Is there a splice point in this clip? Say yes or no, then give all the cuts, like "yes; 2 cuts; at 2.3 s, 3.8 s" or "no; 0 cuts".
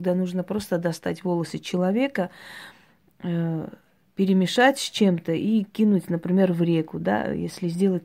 no; 0 cuts